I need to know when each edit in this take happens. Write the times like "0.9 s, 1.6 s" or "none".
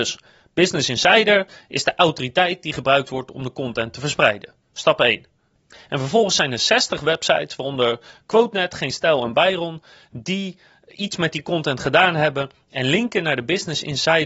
none